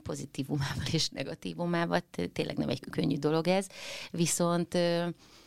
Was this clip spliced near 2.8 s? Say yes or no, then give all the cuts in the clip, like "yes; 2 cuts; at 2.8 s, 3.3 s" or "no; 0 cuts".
yes; 1 cut; at 2.8 s